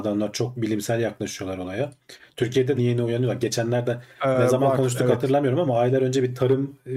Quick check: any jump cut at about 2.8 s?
yes; 1 cut; at 2.8 s

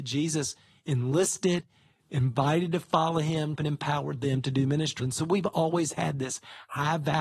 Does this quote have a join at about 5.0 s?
yes; 2 cuts; at 3.6 s, 5.0 s

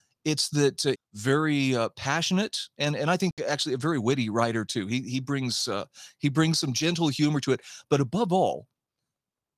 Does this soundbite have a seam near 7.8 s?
no; 1 cut; at 0.9 s

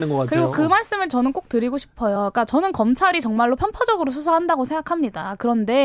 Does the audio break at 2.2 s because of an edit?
no; 0 cuts

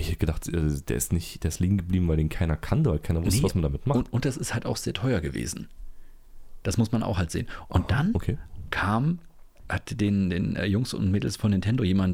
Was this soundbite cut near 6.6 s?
no; 1 cut; at 9.6 s

